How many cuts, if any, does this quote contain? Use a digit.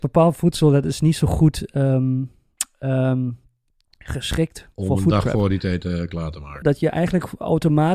2